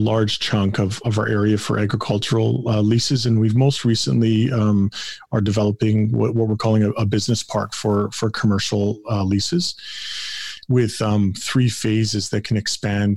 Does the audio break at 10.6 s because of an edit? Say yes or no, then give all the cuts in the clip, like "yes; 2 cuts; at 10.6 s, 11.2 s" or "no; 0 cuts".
no; 1 cut; at 1.0 s